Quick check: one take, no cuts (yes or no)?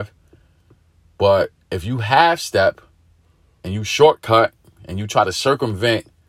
no